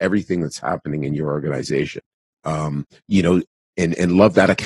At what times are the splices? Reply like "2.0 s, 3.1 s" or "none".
2.3 s